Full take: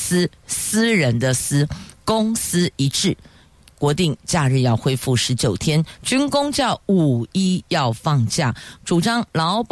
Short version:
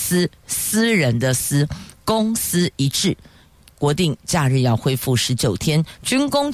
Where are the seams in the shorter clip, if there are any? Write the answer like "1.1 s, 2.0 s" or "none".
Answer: none

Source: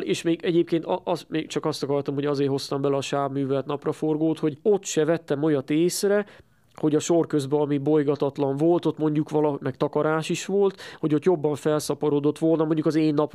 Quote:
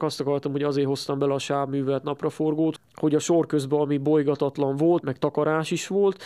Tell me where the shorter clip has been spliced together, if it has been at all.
2.8 s, 5.0 s

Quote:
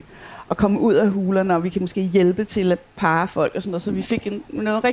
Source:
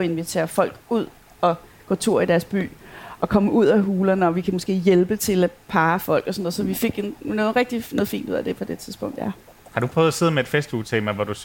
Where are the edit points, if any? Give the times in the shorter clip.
none

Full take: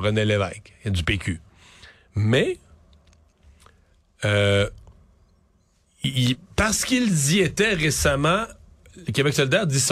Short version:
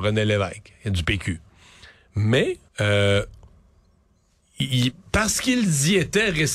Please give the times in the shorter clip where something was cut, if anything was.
2.7 s

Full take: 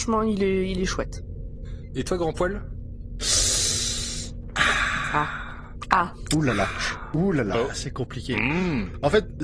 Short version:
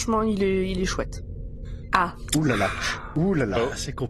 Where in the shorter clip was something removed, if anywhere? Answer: 1.9 s

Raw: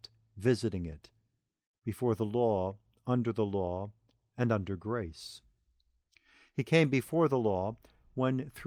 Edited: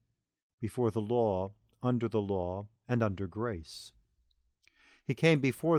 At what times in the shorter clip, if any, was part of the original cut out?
2.8 s

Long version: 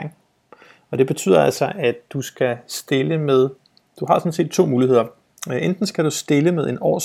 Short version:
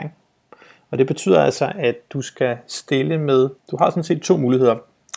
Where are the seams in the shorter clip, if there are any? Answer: 3.6 s

